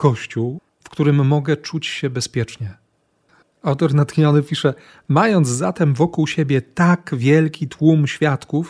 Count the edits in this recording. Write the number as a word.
one